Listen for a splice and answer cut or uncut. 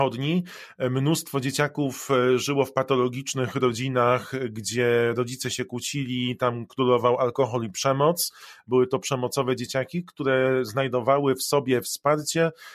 uncut